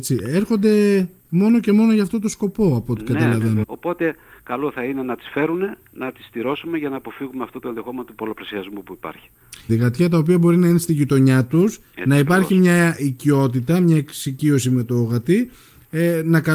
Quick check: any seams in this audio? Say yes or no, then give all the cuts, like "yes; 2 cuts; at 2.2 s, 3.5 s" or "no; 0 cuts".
yes; 2 cuts; at 3.6 s, 9.7 s